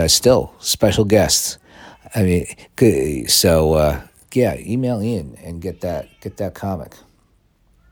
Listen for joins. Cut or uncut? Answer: uncut